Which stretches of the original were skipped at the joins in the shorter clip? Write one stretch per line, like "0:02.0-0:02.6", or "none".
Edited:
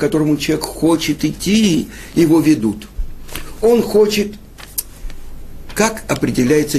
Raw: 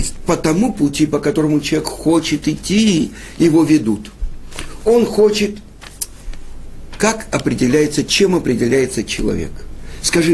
none